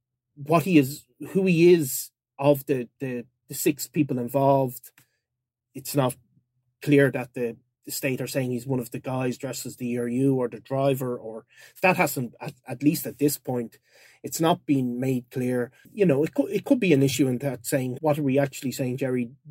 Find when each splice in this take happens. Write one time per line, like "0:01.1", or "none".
0:15.8
0:18.0